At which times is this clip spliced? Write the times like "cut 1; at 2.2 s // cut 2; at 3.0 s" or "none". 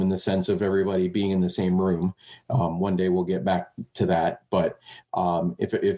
none